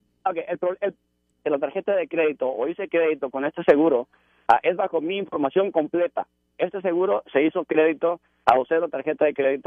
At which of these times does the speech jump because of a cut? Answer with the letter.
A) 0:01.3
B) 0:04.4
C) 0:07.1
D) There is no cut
A